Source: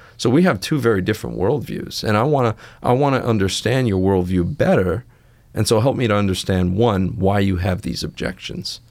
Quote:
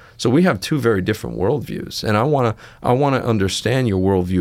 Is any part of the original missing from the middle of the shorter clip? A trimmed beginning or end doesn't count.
no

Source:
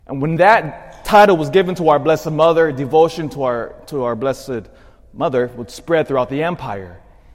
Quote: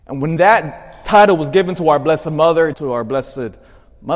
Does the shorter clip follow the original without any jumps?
no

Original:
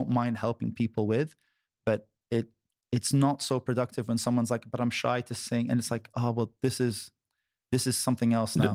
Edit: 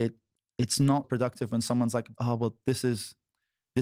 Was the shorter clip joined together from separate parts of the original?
yes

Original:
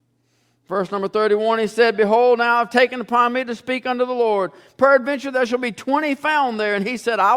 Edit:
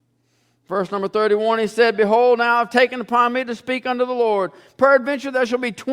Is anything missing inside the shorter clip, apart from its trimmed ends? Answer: no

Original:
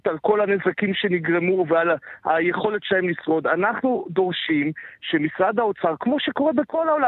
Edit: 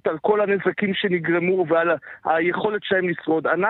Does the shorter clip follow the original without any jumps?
yes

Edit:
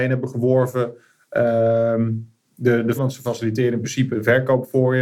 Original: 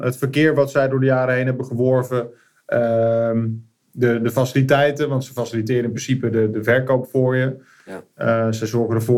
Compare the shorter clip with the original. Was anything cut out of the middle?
yes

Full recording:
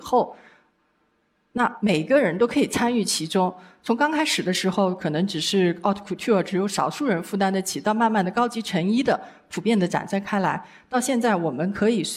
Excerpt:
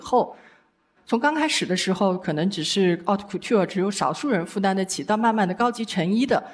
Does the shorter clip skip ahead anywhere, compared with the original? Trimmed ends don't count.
yes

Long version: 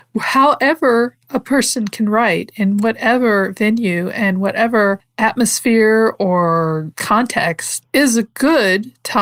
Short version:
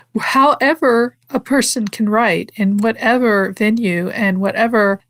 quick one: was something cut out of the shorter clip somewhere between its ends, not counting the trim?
no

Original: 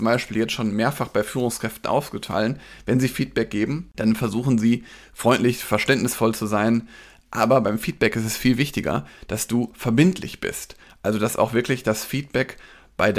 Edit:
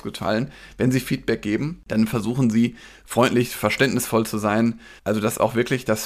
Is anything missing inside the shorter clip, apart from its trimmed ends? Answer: yes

